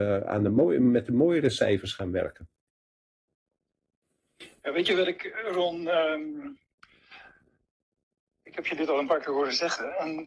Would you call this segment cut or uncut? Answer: uncut